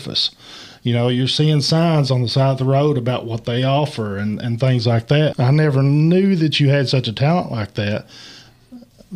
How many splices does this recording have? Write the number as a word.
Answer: one